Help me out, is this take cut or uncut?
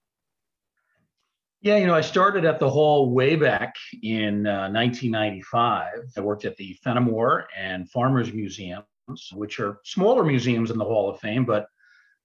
cut